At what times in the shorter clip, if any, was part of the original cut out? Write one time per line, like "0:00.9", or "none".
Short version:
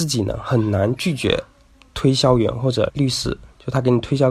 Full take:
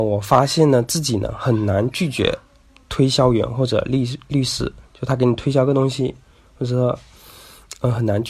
0:02.9